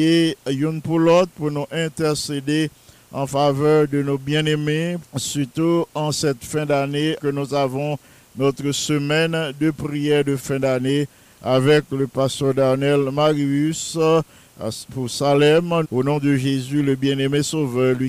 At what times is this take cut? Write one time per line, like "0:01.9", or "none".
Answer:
0:05.0
0:07.2
0:15.8